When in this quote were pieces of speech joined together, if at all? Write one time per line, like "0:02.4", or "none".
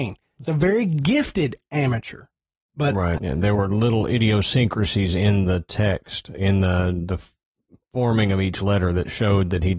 0:03.2